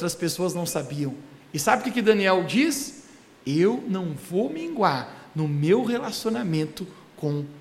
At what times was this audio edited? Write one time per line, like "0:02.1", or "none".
none